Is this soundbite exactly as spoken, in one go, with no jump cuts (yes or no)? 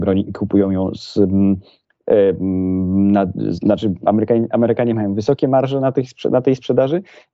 yes